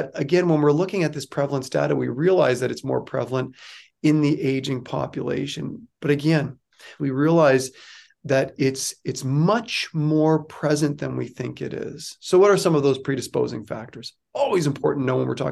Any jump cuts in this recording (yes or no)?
yes